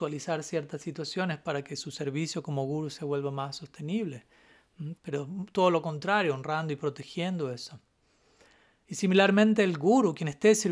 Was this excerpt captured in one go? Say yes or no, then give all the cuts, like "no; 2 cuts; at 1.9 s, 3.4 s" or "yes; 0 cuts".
no; 1 cut; at 4.9 s